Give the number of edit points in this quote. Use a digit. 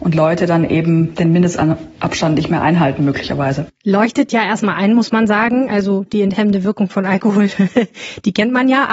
0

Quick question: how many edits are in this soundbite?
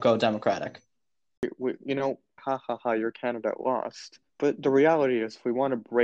2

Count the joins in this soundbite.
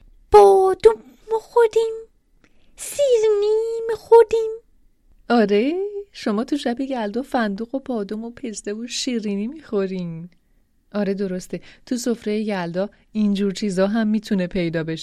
0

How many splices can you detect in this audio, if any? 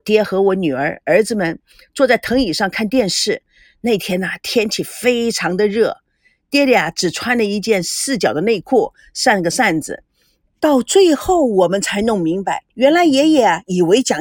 2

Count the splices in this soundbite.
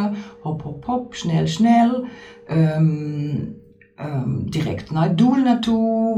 0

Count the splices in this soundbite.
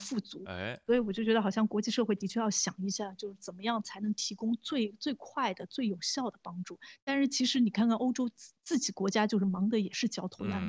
0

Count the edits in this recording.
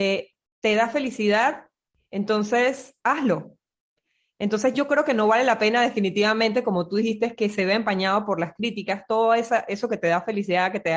1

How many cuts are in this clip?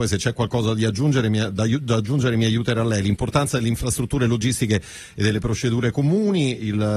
0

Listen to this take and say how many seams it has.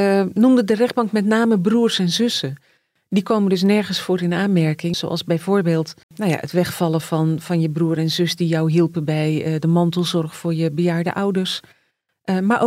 2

